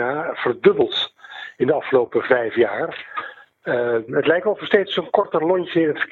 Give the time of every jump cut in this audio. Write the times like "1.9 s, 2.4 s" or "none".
4.1 s